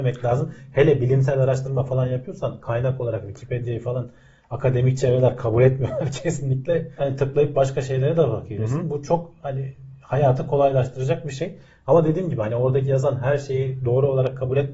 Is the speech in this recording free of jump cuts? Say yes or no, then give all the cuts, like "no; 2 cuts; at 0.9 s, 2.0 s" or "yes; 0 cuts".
no; 1 cut; at 7.0 s